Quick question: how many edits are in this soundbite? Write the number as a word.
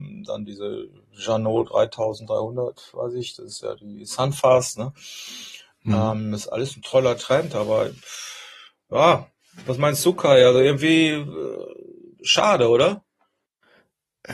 one